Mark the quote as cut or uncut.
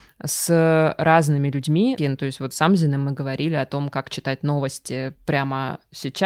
cut